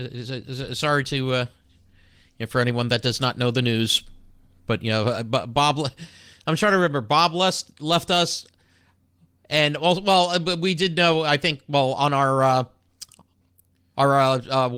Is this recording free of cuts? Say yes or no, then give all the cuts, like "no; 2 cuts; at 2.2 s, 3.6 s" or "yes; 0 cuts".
yes; 0 cuts